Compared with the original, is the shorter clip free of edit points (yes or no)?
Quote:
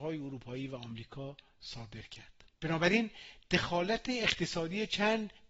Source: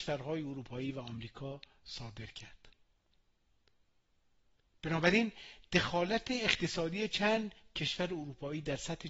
no